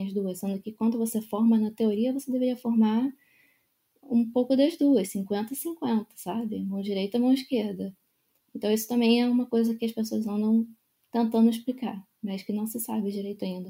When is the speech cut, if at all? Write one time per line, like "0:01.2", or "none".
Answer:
none